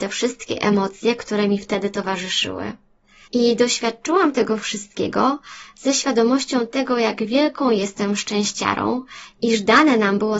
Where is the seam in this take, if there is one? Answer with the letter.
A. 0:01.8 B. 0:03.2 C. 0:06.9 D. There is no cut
B